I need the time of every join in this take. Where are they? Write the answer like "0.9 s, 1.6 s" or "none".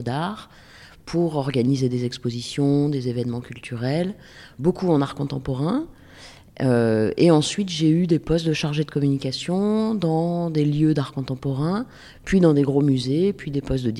none